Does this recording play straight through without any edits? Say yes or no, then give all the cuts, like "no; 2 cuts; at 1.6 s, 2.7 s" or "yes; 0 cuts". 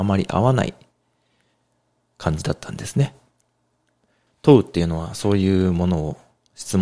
no; 1 cut; at 4.3 s